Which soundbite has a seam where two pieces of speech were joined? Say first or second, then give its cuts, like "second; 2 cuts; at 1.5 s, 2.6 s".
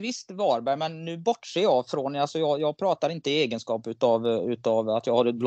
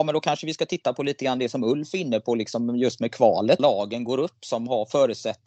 second; 1 cut; at 3.6 s